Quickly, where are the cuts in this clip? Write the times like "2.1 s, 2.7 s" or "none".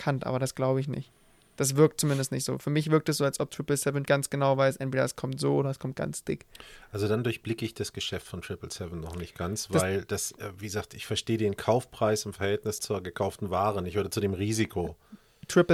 4.1 s, 12.8 s